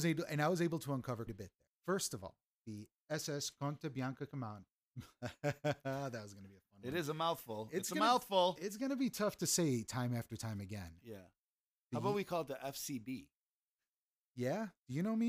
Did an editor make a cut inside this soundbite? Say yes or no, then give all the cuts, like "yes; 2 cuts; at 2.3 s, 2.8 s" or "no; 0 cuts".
yes; 1 cut; at 1.3 s